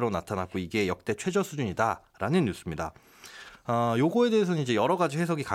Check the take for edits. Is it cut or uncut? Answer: uncut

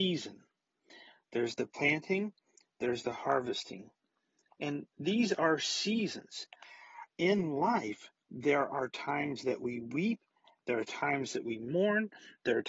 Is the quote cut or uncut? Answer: uncut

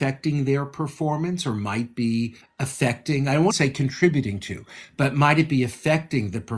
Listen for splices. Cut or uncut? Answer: cut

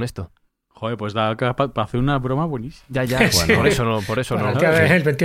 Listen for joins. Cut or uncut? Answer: uncut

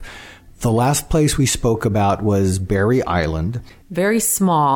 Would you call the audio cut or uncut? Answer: cut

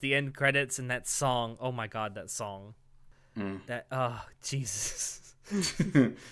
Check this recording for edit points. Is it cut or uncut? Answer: uncut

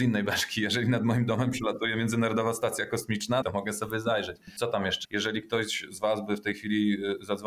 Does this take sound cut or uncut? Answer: cut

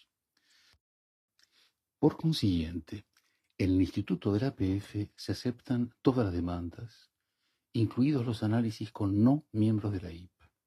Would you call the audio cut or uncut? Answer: uncut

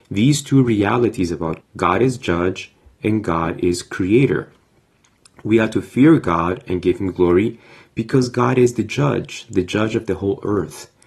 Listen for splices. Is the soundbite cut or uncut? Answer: cut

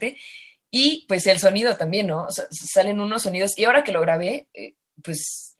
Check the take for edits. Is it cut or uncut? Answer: uncut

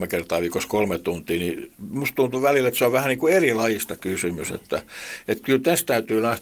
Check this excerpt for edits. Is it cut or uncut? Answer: uncut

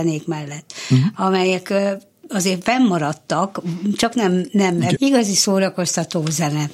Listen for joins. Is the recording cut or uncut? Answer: cut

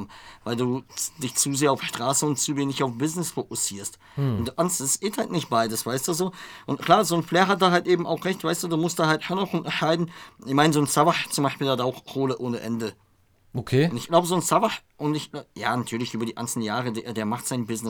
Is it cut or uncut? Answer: uncut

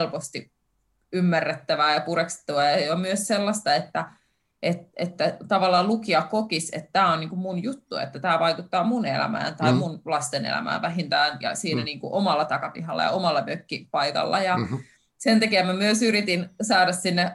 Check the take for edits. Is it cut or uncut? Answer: uncut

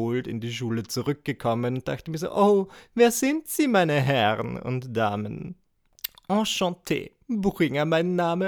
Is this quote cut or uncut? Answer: uncut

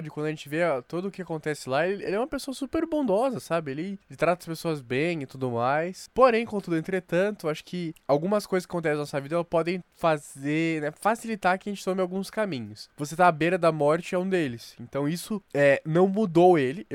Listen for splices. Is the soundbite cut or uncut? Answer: uncut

